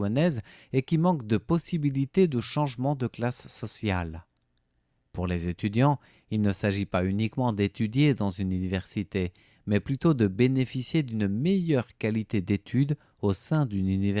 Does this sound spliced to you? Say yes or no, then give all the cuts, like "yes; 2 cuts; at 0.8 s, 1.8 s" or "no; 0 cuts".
no; 0 cuts